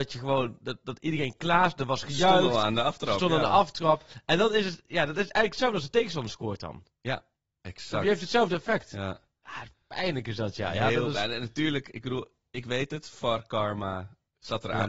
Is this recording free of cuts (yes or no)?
yes